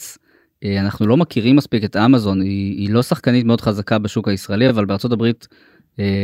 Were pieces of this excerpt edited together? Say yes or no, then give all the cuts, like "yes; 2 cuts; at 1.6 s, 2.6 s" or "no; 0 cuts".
no; 0 cuts